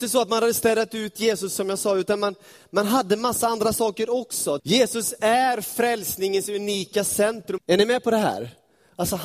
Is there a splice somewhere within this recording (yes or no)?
yes